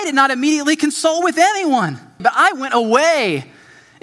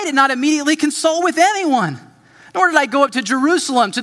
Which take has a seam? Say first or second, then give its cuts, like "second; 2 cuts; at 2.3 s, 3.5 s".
first; 1 cut; at 2.2 s